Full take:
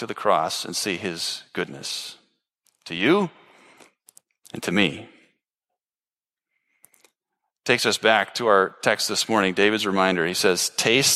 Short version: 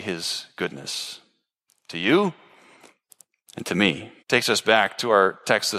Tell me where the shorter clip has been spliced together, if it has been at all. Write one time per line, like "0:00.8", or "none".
0:04.2